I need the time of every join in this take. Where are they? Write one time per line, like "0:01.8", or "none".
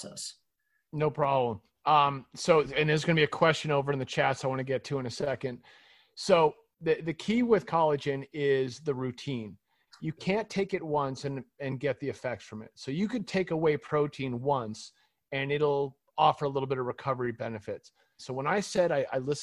0:18.2

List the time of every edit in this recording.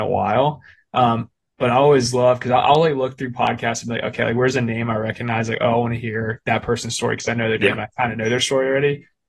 none

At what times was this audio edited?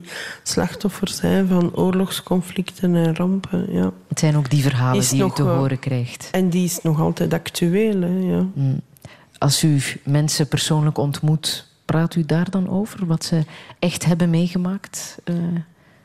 none

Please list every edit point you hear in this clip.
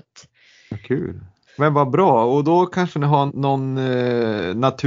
0:01.5
0:03.3

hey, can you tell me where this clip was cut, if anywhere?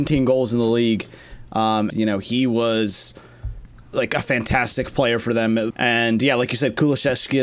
0:01.9
0:03.9
0:05.7

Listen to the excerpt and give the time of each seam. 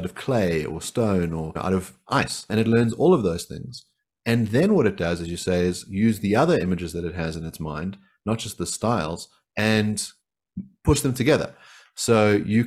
none

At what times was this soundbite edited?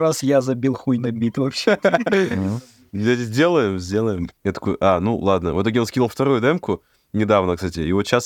0:04.3

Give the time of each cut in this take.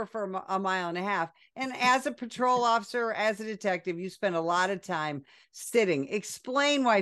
none

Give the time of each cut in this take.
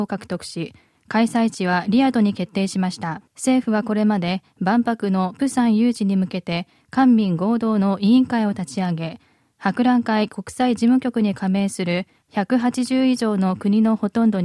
0:03.3

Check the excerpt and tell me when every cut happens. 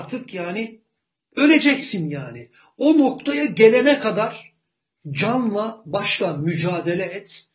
none

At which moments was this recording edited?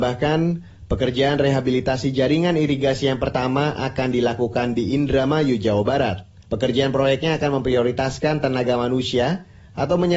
0:06.4

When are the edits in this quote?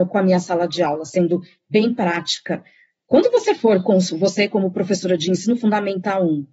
none

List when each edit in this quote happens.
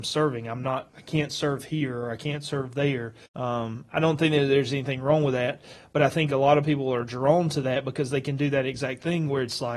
0:03.2

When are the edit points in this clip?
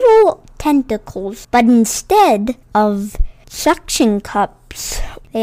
0:01.4

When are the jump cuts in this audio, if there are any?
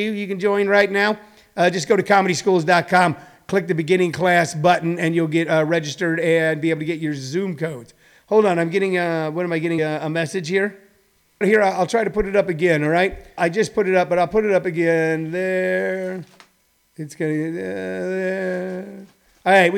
0:09.8
0:11.4
0:13.4

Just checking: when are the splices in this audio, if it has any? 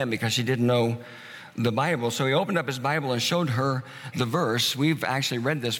none

